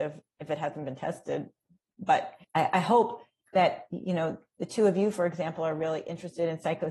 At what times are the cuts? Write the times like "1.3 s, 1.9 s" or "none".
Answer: 2.4 s